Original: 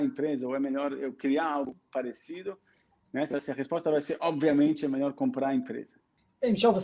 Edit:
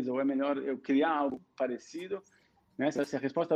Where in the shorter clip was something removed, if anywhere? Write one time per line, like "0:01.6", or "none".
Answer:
none